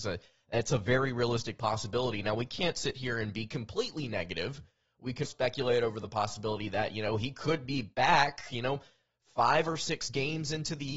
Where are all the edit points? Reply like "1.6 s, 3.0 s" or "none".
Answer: 5.2 s